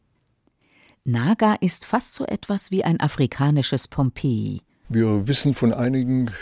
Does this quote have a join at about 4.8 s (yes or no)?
yes